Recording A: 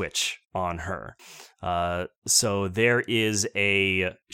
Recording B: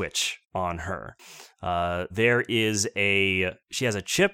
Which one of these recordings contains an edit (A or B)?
B